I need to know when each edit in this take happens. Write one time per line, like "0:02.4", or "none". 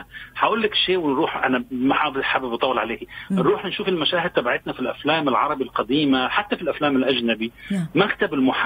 none